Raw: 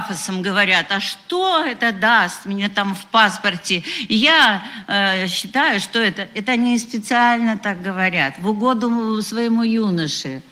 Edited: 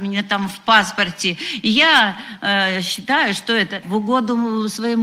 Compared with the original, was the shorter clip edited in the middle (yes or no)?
yes